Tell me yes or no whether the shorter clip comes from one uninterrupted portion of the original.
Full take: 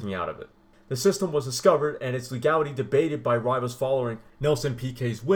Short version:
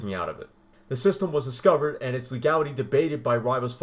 yes